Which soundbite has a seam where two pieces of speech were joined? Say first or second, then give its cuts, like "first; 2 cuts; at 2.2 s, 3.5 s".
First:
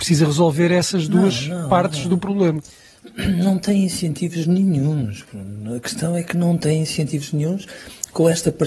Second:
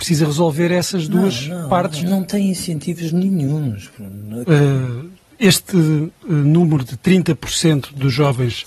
second; 2 cuts; at 2.0 s, 4.4 s